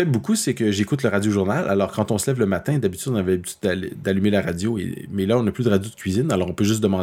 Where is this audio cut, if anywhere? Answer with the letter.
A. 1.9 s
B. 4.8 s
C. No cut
C